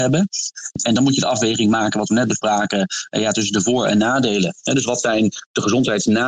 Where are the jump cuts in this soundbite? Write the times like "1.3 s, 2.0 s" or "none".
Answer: none